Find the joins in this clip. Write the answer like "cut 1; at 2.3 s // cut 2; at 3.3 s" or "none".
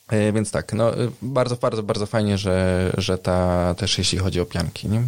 cut 1; at 3.8 s